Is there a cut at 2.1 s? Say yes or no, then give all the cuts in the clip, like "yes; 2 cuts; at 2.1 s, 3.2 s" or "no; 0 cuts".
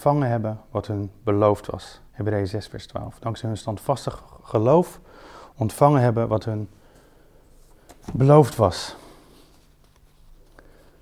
yes; 2 cuts; at 2.1 s, 8.0 s